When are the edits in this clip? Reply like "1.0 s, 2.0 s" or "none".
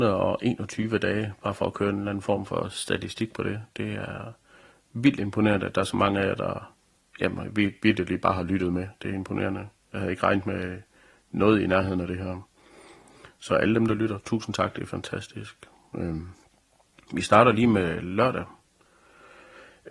none